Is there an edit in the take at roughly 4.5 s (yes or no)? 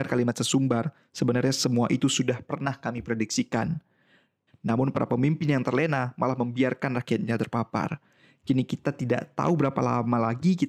yes